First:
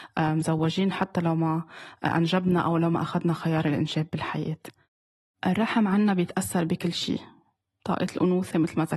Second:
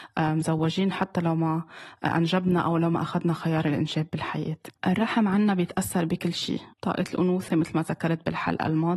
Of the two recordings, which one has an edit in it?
second; 2 cuts; at 4.8 s, 6.7 s

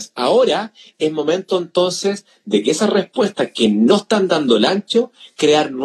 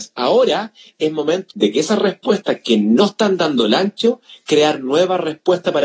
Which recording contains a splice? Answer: second; 1 cut; at 1.5 s

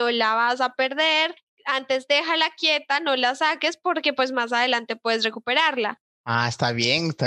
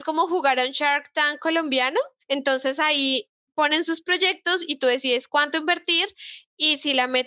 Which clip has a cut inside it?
first; 1 cut; at 6.0 s

